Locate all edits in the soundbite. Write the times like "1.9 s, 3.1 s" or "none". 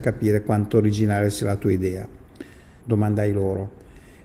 2.8 s